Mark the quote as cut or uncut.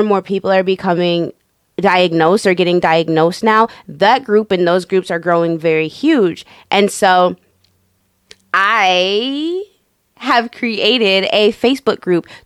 uncut